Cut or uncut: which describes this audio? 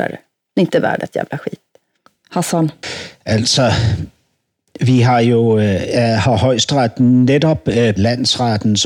cut